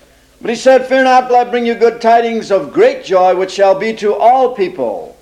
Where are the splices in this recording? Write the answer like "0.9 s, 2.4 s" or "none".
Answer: 1.3 s